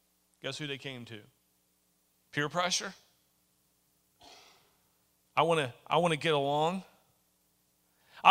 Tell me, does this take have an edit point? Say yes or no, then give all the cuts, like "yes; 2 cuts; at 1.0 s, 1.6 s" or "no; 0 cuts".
yes; 1 cut; at 2.1 s